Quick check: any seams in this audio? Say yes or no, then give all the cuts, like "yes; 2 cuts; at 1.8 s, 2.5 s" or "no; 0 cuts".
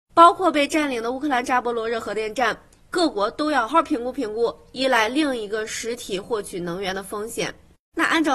yes; 1 cut; at 3.7 s